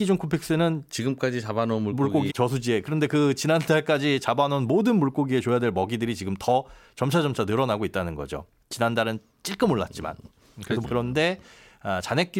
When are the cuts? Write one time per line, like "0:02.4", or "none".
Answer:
0:02.3
0:10.8